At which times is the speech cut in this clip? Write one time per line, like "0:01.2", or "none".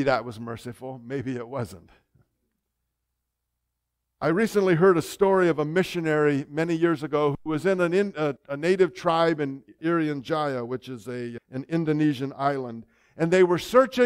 0:08.4
0:09.8
0:11.4